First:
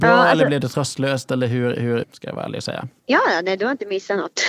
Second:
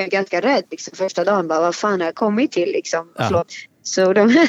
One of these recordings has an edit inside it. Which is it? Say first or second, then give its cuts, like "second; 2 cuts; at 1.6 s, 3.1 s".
first; 1 cut; at 2.0 s